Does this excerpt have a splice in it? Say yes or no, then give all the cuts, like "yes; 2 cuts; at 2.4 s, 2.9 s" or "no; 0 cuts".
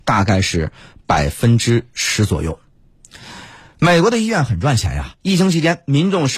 no; 0 cuts